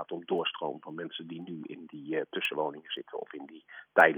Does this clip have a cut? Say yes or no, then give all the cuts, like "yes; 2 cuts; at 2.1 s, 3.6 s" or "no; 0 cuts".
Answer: no; 0 cuts